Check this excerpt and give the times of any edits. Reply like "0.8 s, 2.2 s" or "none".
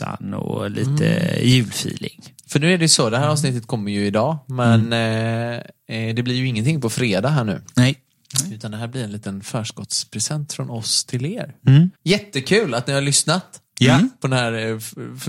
11.9 s